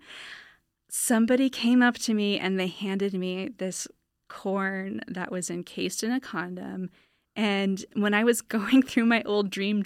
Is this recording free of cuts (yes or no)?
yes